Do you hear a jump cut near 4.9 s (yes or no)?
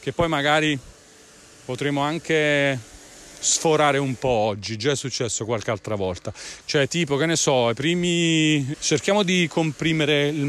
no